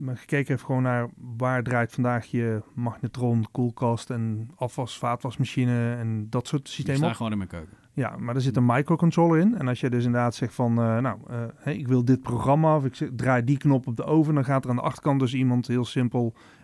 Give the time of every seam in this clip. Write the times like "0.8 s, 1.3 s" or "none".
none